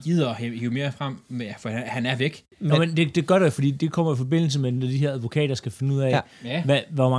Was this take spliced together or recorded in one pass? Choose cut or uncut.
uncut